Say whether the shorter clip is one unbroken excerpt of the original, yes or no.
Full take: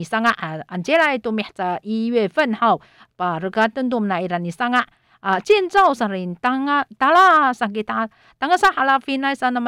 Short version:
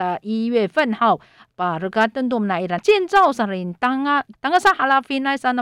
no